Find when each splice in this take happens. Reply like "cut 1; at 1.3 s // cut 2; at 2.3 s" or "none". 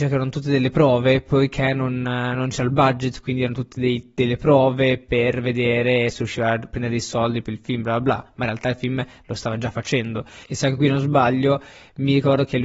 cut 1; at 10.4 s